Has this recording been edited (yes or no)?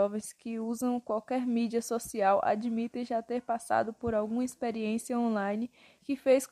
no